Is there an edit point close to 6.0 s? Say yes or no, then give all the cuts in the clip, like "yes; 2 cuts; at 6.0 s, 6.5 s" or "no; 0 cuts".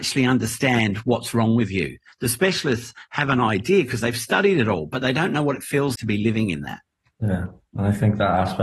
yes; 1 cut; at 6.0 s